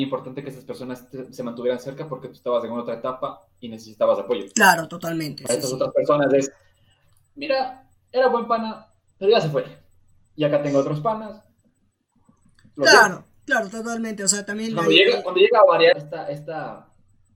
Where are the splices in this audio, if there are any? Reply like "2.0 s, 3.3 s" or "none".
15.9 s